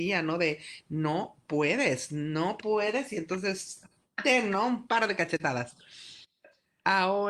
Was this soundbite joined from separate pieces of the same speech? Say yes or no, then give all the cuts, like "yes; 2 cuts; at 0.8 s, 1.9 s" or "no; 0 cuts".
no; 0 cuts